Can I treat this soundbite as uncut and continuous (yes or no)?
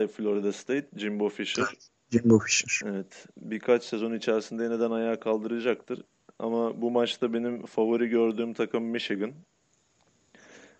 yes